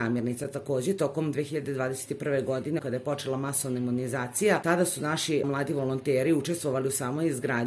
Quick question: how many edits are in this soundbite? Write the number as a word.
zero